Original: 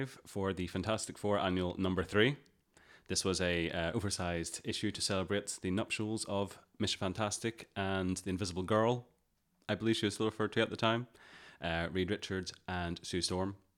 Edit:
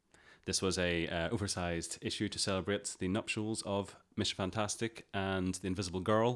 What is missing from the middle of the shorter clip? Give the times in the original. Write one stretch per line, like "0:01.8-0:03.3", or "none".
none